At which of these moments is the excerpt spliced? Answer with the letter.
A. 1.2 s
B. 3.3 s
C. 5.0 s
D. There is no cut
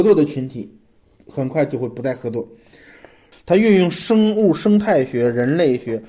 B